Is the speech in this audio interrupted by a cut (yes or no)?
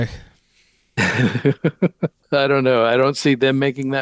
yes